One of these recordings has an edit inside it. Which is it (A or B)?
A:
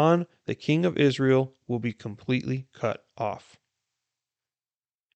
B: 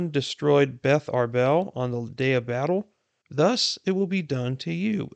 B